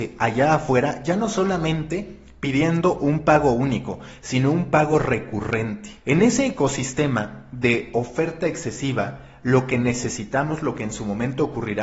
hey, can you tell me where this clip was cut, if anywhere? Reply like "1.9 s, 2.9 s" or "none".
6.0 s